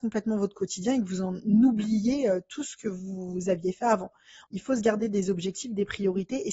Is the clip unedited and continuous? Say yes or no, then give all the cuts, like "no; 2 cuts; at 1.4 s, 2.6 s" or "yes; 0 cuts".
no; 1 cut; at 4.5 s